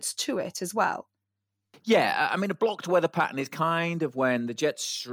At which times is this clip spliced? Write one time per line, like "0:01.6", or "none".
none